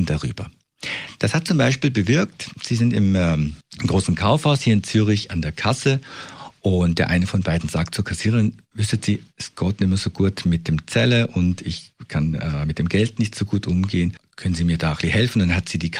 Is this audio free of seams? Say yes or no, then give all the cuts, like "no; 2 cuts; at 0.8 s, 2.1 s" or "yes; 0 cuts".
yes; 0 cuts